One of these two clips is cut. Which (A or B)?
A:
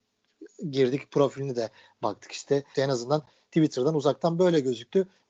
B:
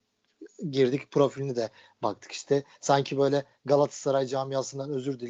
A